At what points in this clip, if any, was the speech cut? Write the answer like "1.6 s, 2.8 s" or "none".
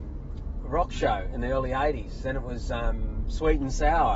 none